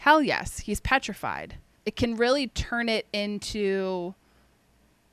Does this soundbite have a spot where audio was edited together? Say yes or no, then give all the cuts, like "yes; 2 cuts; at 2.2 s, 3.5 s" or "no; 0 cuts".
yes; 1 cut; at 1.7 s